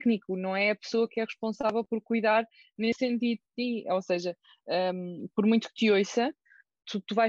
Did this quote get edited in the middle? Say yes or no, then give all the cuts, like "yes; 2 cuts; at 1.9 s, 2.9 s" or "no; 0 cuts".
no; 0 cuts